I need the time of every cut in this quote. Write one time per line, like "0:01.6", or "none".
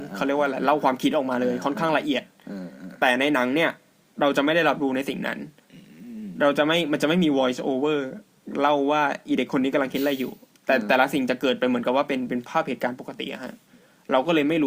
none